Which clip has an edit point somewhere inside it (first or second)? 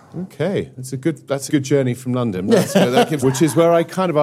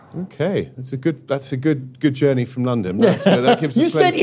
first